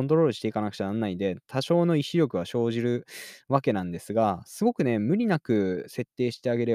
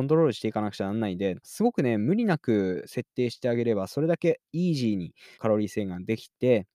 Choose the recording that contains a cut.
second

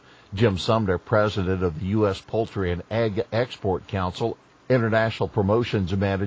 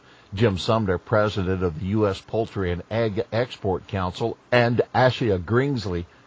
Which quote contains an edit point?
first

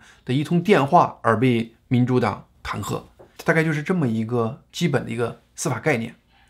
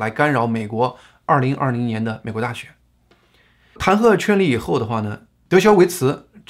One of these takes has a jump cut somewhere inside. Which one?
first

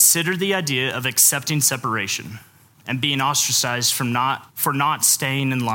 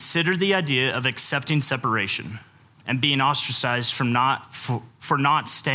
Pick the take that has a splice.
first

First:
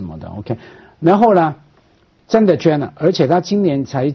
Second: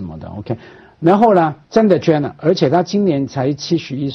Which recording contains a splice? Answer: second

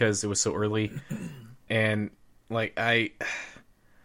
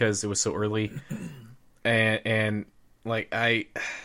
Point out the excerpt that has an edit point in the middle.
first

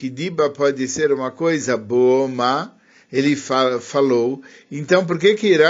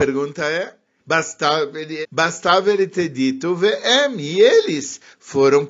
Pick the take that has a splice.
second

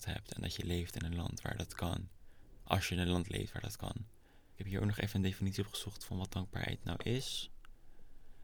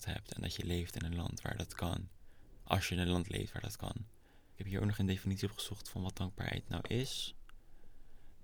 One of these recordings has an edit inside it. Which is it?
second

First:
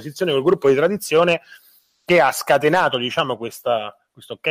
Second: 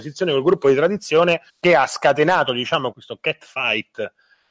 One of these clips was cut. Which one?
second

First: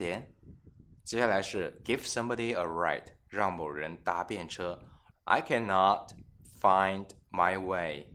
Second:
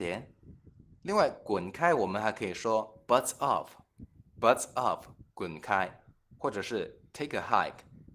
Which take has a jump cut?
first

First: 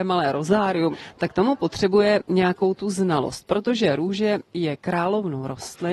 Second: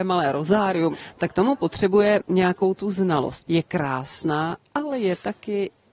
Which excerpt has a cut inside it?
second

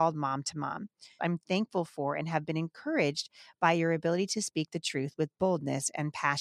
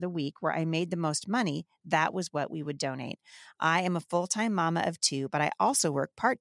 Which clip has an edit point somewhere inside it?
first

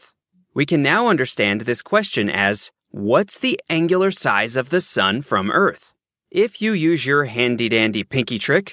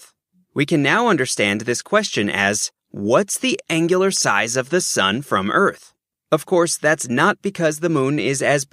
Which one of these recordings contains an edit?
second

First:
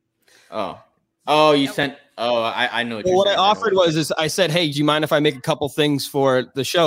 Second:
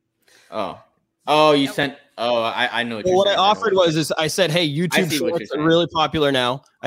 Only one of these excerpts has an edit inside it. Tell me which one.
first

